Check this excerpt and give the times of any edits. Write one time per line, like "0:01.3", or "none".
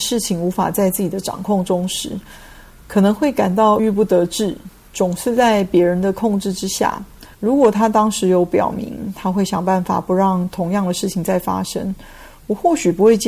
0:03.8
0:07.3

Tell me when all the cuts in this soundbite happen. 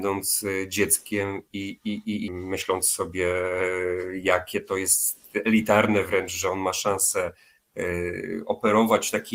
0:02.3

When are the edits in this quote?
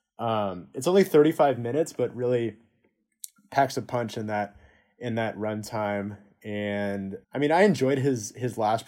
0:07.2

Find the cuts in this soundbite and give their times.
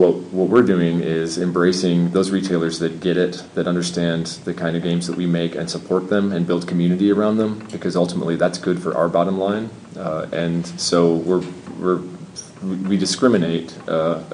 none

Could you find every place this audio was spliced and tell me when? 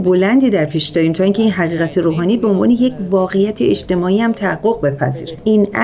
none

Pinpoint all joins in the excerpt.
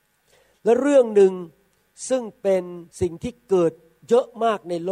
0:02.9

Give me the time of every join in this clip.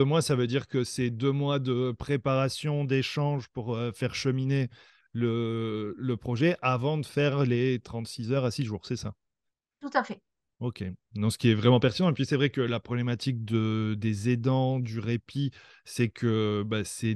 none

